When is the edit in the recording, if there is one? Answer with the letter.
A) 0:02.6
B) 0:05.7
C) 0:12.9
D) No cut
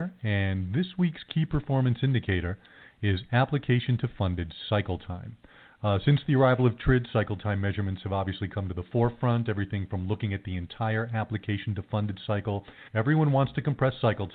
C